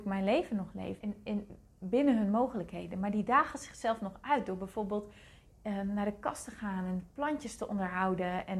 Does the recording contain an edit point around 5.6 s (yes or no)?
no